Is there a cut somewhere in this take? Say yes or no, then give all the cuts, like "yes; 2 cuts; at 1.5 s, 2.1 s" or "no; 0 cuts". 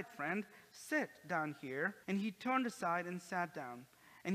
yes; 1 cut; at 2.0 s